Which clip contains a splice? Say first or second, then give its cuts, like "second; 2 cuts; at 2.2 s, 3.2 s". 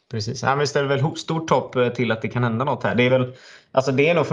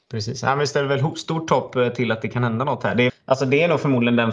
second; 1 cut; at 3.1 s